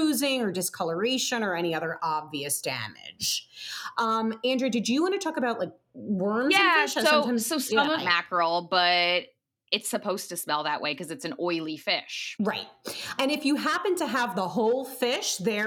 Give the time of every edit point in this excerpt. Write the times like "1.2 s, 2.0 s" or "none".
8.0 s